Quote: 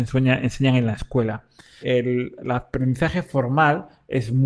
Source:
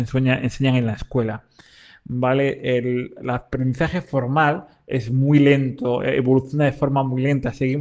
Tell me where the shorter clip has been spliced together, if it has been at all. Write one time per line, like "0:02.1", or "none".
0:01.8